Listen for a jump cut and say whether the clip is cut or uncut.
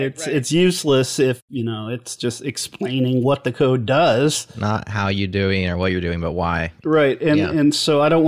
cut